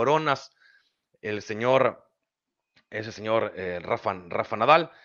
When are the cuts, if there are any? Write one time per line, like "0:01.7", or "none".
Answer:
none